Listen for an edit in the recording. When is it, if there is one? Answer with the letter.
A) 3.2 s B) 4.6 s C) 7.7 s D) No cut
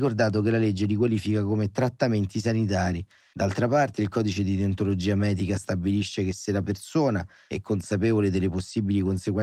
D